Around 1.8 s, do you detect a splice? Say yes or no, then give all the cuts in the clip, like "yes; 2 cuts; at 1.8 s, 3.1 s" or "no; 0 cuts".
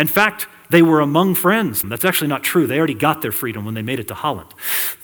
yes; 1 cut; at 1.8 s